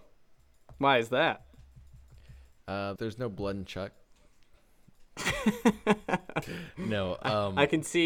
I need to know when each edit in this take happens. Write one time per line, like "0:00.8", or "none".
0:03.0